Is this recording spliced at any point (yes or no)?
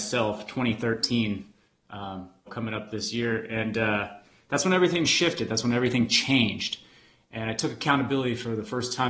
yes